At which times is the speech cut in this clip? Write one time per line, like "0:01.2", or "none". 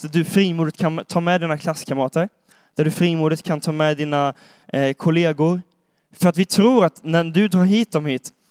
none